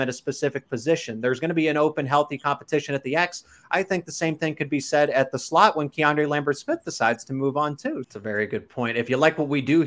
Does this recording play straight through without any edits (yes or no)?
no